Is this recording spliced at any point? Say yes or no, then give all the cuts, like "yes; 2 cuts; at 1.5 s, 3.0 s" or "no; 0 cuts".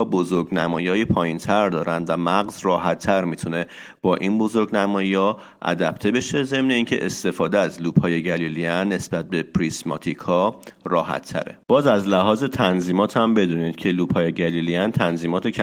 yes; 1 cut; at 11.6 s